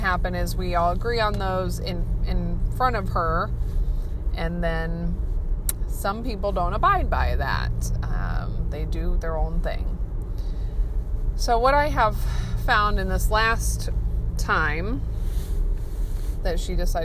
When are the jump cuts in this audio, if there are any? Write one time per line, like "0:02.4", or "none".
none